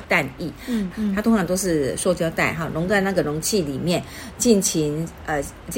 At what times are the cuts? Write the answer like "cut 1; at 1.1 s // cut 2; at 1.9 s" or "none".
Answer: cut 1; at 0.9 s